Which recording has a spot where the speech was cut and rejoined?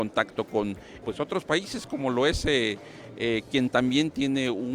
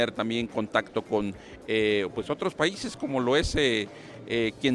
first; 1 cut; at 1.0 s

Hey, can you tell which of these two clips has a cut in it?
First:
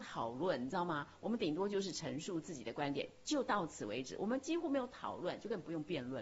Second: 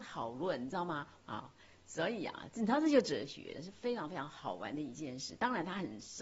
second; 2 cuts; at 1.2 s, 3.5 s

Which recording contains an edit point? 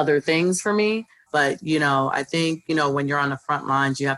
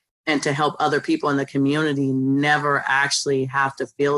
first; 1 cut; at 1.3 s

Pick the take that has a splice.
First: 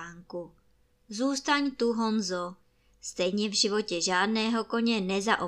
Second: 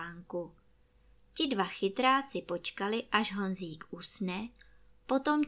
first; 1 cut; at 0.9 s

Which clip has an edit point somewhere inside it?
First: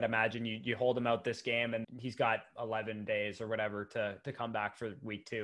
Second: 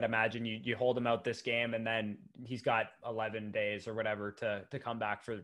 first; 1 cut; at 1.8 s

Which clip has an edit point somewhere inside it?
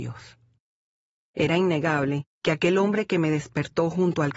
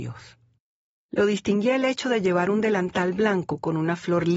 second; 1 cut; at 0.9 s

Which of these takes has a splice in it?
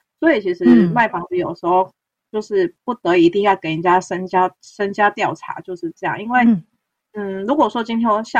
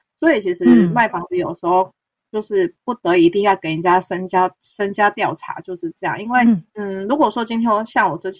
second; 1 cut; at 6.7 s

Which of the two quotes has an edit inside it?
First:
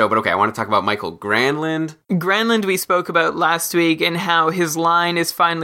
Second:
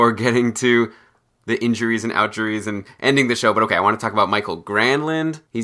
first; 1 cut; at 2.0 s

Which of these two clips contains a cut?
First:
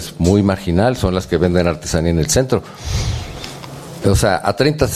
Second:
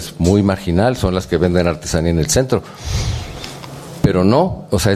first; 1 cut; at 4.0 s

